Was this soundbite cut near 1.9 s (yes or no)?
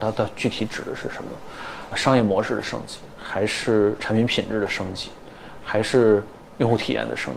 yes